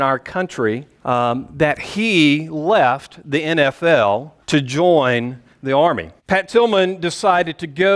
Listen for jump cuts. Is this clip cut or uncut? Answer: cut